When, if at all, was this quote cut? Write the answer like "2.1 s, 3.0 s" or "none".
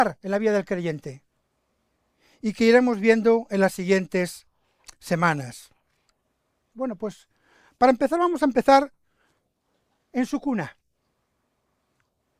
6.7 s